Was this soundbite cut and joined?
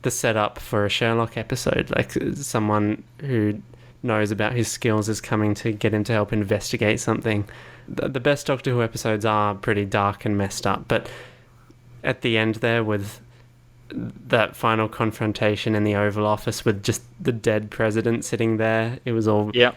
yes; 2 cuts; at 7.9 s, 12.0 s

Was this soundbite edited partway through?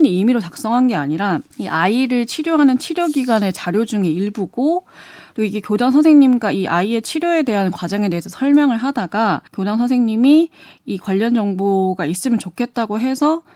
yes; 2 cuts; at 1.5 s, 9.5 s

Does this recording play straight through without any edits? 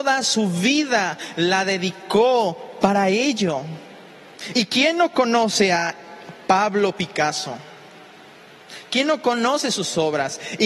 yes; 0 cuts

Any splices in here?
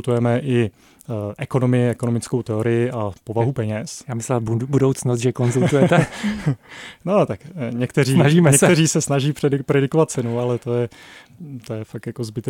no; 0 cuts

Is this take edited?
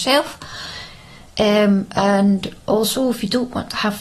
no; 0 cuts

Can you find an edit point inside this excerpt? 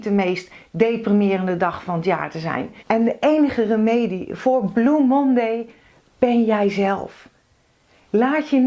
yes; 1 cut; at 2.8 s

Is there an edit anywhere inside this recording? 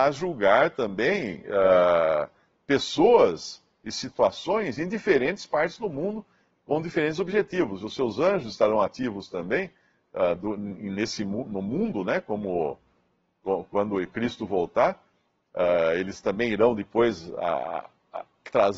no; 0 cuts

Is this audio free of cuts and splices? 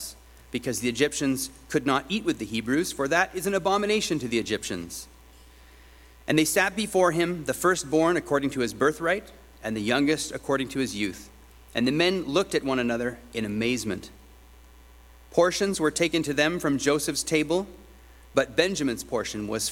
yes; 0 cuts

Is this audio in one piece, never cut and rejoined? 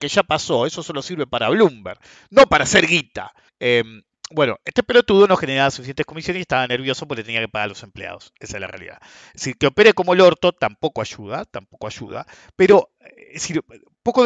no; 1 cut; at 3.5 s

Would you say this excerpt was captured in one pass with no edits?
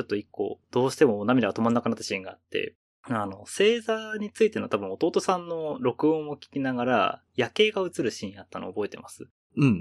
yes; 0 cuts

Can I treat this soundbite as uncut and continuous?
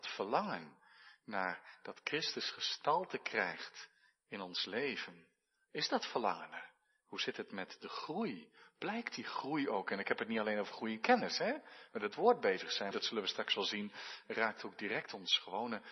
no; 2 cuts; at 11.9 s, 12.9 s

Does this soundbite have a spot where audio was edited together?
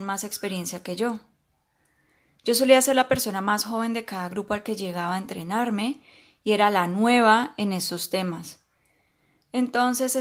no; 0 cuts

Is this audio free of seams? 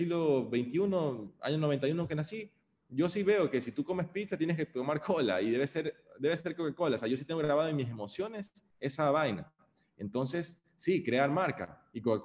yes; 0 cuts

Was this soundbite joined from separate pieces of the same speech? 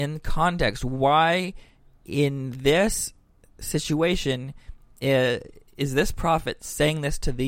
no; 0 cuts

